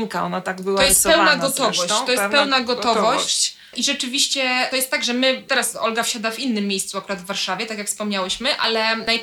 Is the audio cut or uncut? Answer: uncut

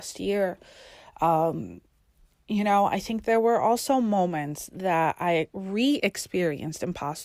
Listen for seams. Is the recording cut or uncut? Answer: uncut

